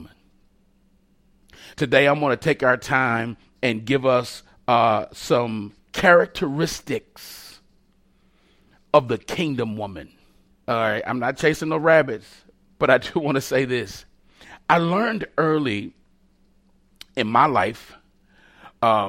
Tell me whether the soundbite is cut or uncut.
cut